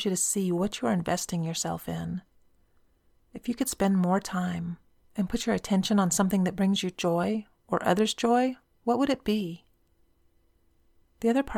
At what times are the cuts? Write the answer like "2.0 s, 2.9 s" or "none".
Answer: 5.0 s